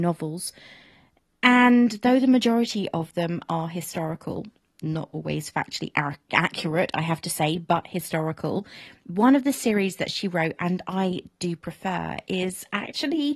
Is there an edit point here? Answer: no; 0 cuts

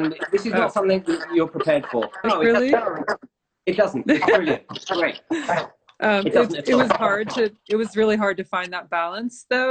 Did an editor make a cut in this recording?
yes; 1 cut; at 2.2 s

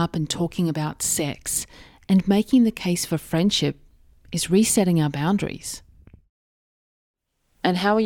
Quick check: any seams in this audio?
no; 0 cuts

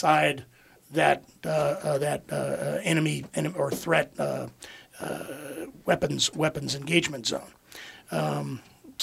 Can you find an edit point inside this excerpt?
yes; 1 cut; at 7.9 s

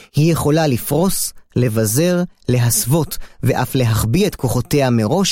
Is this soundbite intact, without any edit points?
yes; 0 cuts

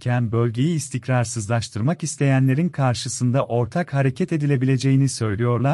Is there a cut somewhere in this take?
no; 0 cuts

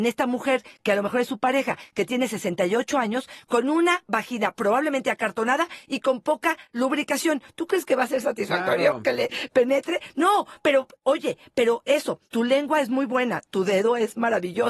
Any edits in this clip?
no; 0 cuts

